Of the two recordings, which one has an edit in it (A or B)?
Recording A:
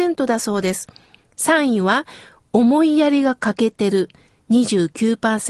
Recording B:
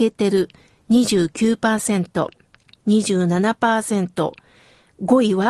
B